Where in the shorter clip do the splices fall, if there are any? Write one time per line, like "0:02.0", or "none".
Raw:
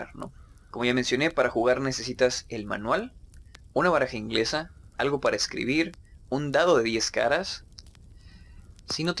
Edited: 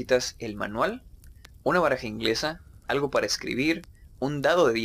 none